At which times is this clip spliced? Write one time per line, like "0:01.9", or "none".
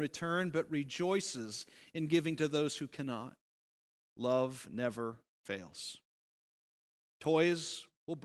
0:04.1